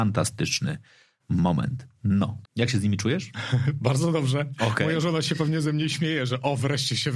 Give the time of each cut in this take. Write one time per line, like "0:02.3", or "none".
0:02.4